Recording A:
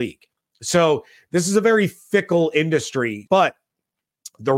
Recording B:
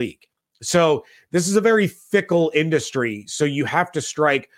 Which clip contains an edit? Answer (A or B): A